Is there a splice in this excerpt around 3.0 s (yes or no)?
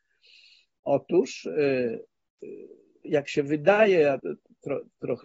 yes